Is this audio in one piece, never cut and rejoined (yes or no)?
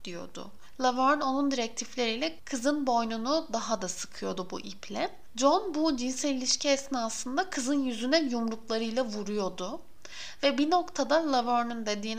yes